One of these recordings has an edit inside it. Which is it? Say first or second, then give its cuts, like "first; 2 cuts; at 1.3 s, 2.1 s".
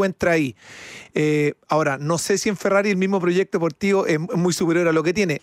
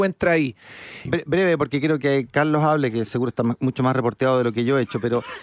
second; 1 cut; at 1.1 s